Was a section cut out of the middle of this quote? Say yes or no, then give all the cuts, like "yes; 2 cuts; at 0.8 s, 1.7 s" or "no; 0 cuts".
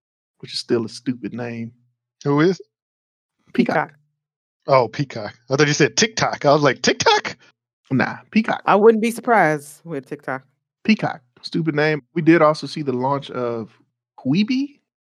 no; 0 cuts